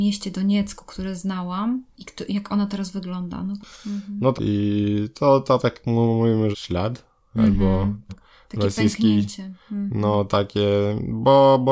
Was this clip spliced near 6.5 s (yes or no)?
yes